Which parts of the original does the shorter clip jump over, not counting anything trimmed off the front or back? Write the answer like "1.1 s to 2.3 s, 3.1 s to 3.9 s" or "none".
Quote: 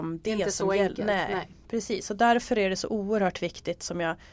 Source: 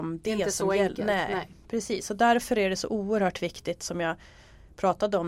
none